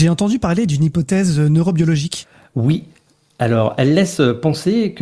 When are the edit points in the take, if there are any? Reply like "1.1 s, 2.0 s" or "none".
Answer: none